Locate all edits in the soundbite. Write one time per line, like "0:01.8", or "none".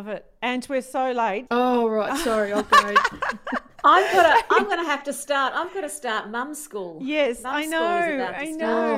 0:01.5

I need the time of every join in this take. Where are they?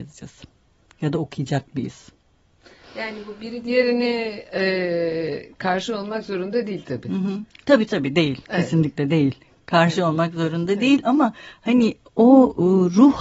none

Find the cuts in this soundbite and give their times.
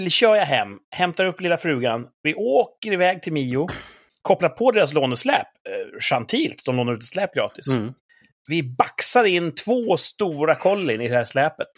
none

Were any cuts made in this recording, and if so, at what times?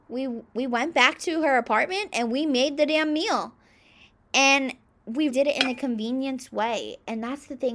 0:05.3

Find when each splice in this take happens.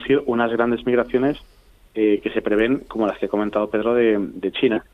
none

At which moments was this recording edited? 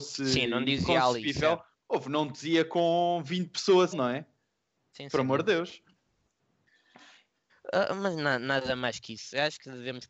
0:03.9
0:07.5

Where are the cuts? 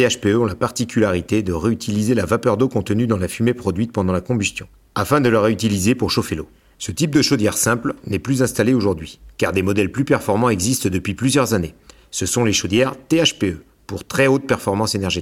0:06.7

